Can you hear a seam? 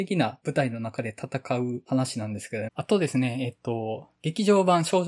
yes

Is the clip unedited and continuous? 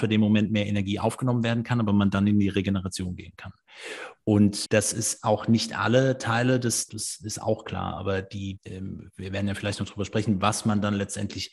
no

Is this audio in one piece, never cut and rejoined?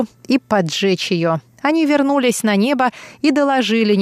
no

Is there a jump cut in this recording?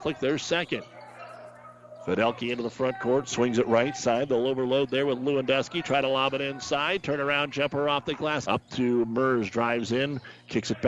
yes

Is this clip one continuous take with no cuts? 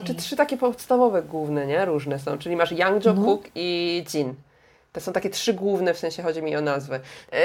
yes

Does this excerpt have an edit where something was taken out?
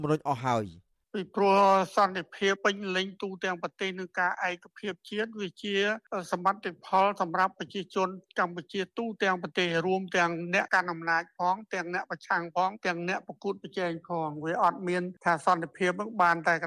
yes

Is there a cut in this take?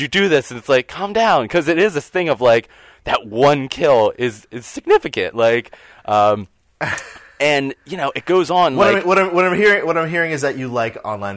no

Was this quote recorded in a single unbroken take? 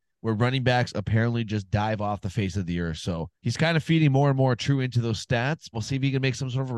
no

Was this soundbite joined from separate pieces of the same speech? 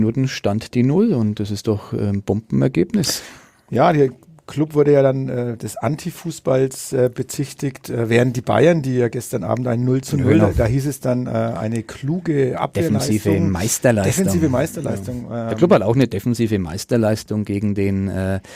no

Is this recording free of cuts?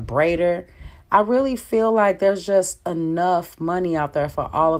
yes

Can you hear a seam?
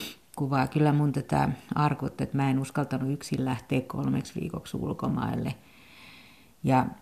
no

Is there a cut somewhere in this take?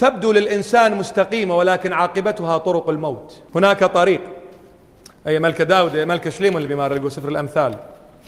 yes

